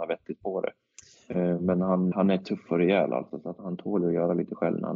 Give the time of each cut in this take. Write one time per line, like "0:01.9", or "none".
0:02.1
0:03.6